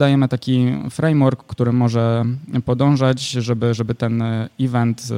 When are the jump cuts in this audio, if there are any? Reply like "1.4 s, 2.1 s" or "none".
none